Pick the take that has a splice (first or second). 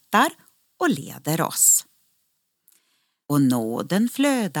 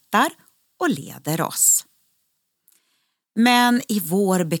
first